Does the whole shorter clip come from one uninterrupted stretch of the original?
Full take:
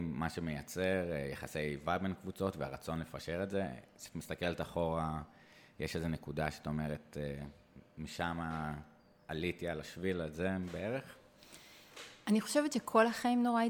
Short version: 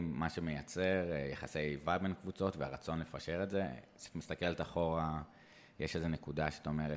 yes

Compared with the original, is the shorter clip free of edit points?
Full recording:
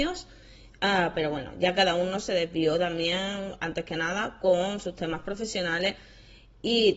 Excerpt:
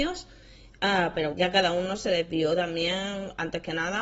no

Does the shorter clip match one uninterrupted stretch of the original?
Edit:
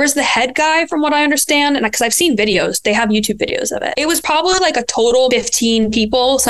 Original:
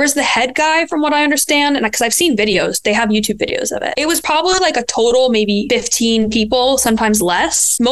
no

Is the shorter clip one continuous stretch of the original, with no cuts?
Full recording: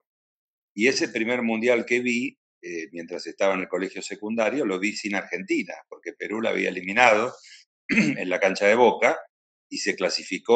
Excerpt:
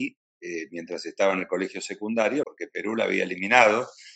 no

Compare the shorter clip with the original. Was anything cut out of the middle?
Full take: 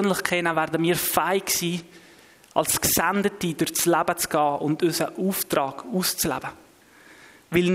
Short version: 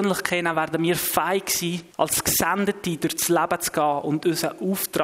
yes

